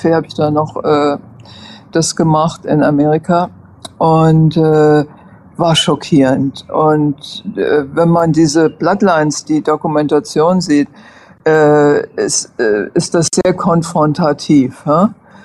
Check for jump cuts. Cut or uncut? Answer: cut